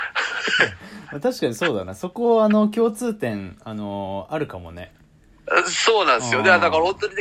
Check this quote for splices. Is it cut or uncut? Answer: uncut